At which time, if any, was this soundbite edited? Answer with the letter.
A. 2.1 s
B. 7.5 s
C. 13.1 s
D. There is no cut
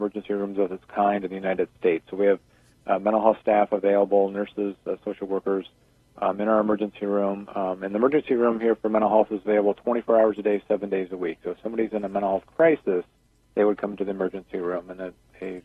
D